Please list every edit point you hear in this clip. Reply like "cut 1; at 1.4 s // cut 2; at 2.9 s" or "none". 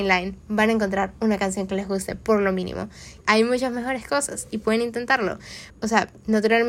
cut 1; at 3.2 s // cut 2; at 5.7 s